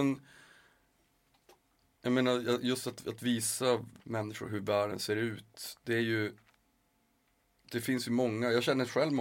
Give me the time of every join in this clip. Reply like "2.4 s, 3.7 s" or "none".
4.0 s